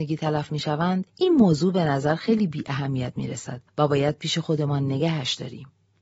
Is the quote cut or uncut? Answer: cut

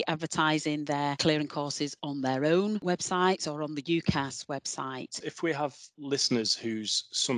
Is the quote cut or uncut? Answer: cut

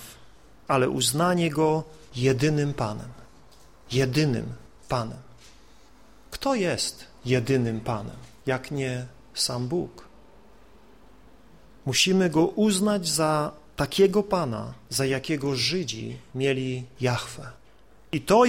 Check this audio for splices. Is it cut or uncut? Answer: uncut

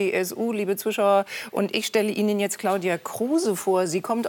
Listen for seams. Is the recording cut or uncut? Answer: uncut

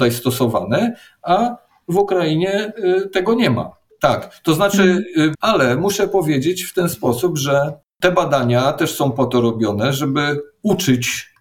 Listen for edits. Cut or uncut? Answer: cut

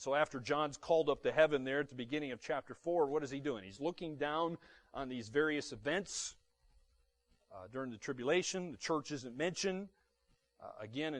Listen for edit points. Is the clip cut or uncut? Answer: uncut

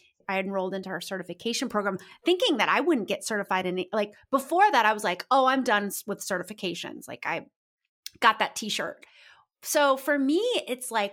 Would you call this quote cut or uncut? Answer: uncut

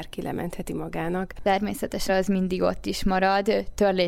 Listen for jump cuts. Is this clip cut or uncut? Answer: cut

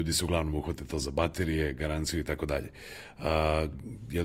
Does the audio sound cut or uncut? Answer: uncut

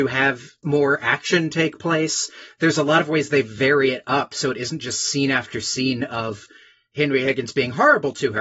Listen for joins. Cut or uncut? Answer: uncut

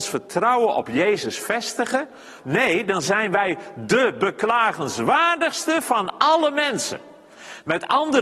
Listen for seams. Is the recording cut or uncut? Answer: cut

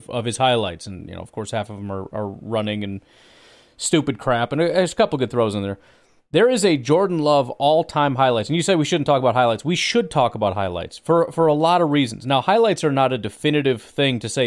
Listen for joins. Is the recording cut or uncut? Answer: uncut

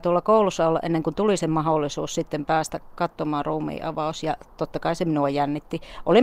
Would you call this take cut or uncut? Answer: uncut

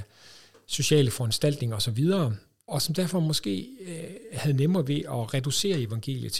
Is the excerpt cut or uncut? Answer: cut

